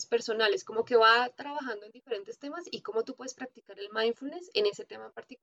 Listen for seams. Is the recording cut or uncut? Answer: uncut